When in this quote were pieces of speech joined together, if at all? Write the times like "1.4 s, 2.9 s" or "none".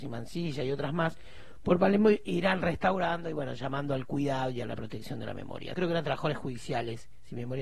5.7 s